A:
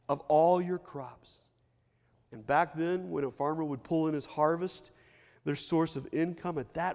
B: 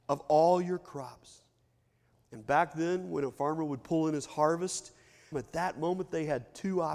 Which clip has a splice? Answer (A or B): B